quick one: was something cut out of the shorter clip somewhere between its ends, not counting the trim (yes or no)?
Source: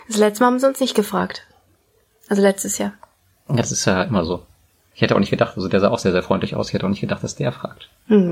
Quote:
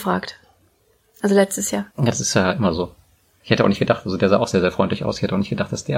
yes